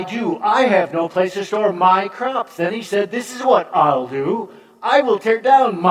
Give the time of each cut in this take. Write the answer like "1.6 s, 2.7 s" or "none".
none